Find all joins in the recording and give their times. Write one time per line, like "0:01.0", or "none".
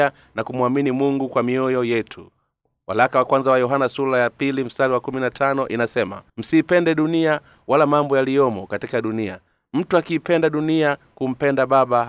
0:06.3